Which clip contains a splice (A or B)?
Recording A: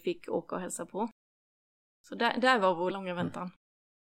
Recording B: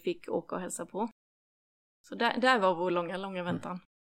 A